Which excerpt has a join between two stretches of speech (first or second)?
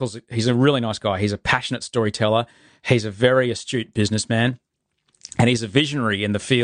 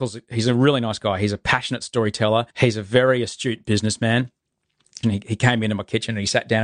second